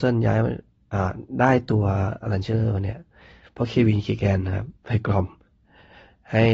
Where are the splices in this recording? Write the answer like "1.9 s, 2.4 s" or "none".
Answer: 4.8 s

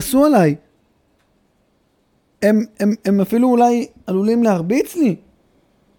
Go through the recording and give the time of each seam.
none

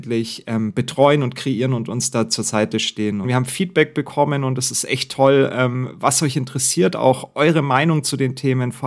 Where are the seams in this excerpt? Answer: 3.2 s

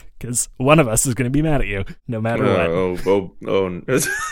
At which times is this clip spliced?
none

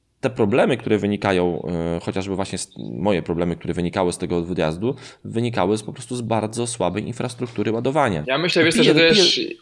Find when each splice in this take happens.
8.2 s

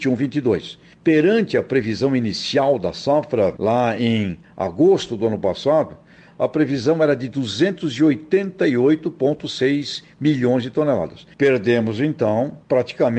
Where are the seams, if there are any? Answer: none

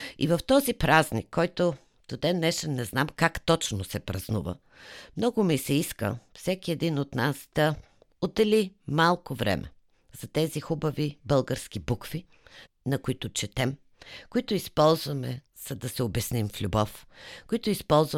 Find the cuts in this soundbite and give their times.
12.7 s, 15.5 s

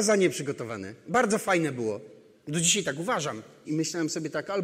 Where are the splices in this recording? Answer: 3.6 s

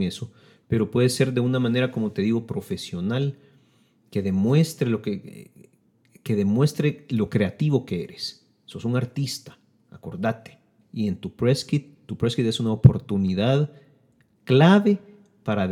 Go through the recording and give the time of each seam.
10.8 s

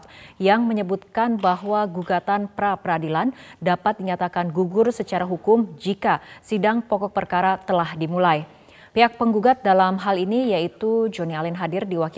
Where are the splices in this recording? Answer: 8.9 s

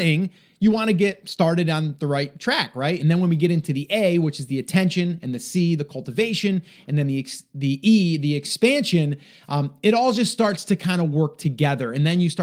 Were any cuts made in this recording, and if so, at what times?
3.0 s

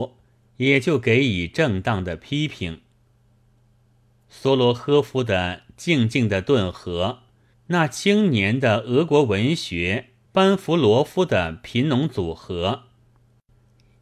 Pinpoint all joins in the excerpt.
7.5 s, 10.3 s

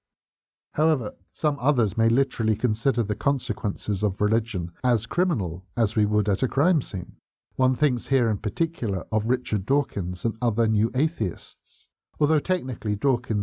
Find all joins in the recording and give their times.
none

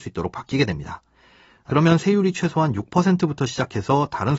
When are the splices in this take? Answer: 1.7 s

